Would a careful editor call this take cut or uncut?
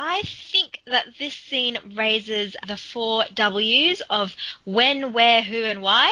cut